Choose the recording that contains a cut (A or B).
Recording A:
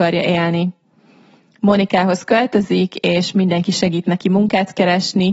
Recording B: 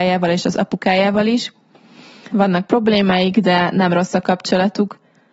B